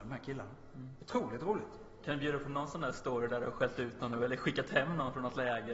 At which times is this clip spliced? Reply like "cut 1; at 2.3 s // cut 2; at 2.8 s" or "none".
none